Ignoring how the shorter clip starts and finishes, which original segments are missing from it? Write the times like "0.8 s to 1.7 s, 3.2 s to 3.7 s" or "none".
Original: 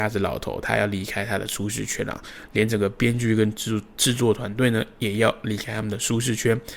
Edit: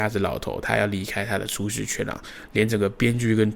none